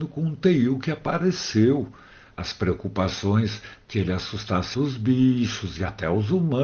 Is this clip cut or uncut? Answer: cut